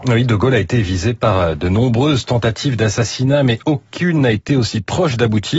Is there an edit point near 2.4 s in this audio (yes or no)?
no